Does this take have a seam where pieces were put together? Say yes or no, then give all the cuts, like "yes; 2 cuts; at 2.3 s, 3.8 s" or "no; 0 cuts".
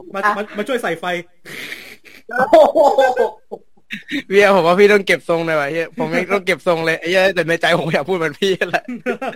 no; 0 cuts